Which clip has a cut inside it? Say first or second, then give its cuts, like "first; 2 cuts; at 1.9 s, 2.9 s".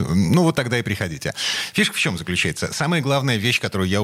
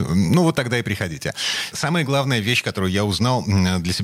second; 1 cut; at 1.7 s